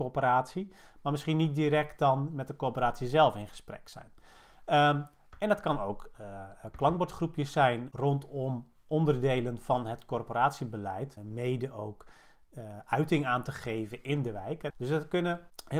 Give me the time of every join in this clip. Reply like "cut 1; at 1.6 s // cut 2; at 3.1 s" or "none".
cut 1; at 11.2 s // cut 2; at 14.7 s